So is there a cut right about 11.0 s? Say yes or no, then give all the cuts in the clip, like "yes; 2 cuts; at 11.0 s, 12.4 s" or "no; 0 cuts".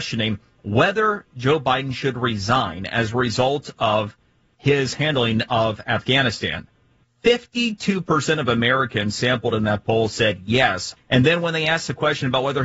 yes; 1 cut; at 11.0 s